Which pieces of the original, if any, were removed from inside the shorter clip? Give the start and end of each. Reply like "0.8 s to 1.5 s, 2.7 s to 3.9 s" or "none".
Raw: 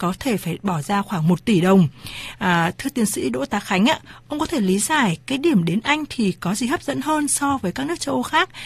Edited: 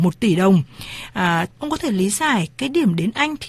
2.8 s to 4.2 s